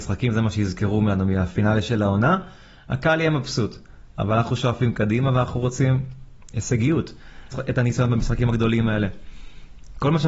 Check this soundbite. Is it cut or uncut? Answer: cut